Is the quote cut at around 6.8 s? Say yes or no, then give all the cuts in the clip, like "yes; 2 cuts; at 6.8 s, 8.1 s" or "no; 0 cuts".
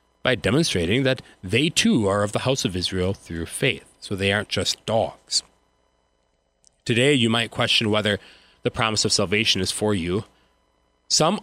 no; 0 cuts